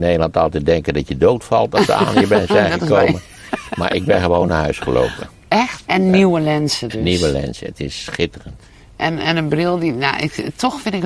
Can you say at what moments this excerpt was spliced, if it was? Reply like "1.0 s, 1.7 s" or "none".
5.8 s